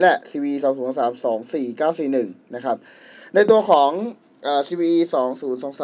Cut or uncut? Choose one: uncut